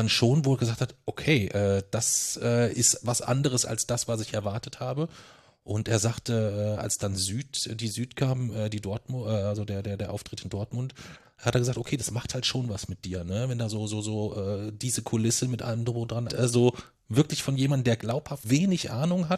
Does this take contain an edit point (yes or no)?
yes